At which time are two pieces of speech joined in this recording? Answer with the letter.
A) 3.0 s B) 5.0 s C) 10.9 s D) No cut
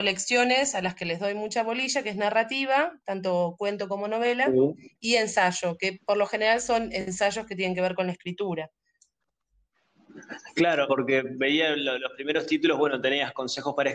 C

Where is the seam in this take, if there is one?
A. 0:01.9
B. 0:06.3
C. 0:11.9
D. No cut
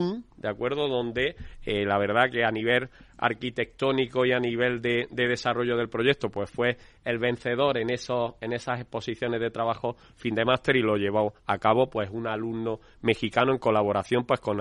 D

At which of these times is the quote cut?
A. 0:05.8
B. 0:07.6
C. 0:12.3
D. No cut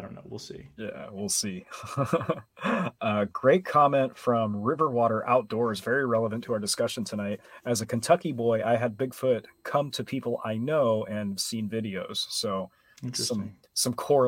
D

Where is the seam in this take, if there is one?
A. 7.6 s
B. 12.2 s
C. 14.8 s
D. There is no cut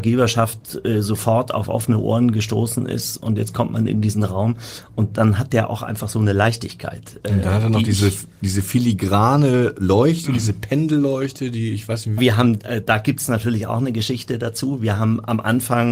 B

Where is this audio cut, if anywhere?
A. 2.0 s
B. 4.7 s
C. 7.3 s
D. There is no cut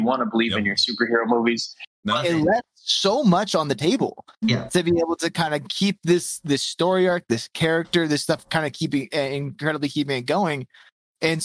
A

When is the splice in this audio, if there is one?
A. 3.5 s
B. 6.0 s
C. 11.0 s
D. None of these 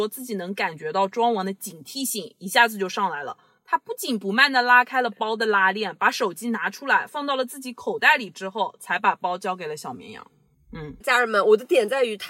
C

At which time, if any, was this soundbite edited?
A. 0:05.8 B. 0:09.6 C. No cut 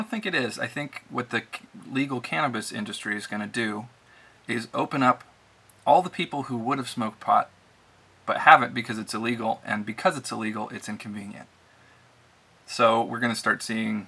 C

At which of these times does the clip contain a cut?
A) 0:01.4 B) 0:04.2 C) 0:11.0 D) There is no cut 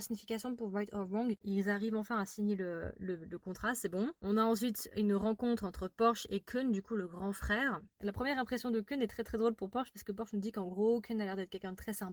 A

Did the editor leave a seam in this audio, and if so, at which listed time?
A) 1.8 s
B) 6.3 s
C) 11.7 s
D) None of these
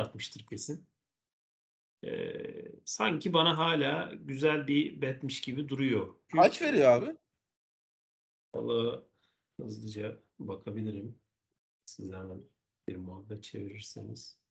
B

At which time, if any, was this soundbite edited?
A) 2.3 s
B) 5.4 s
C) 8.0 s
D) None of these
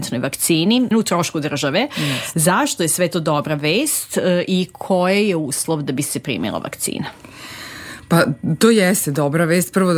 D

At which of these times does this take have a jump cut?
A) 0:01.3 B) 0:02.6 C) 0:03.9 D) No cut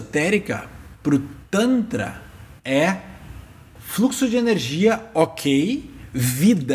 B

